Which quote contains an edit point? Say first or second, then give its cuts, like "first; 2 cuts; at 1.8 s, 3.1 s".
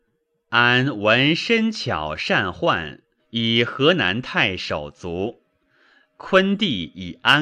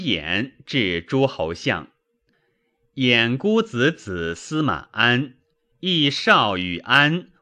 first; 1 cut; at 3.2 s